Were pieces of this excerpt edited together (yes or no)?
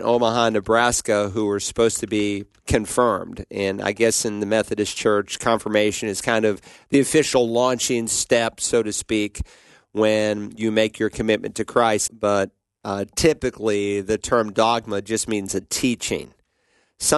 yes